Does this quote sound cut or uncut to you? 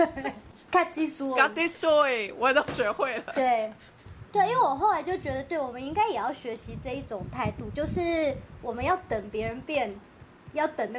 uncut